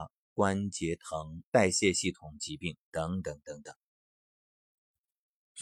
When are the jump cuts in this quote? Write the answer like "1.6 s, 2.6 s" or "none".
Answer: 1.4 s